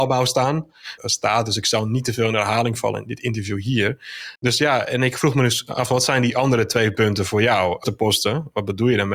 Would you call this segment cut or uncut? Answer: cut